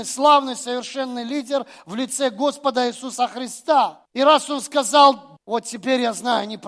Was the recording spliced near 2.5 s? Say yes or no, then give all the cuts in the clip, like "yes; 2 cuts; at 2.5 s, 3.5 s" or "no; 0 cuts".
no; 2 cuts; at 4.1 s, 5.4 s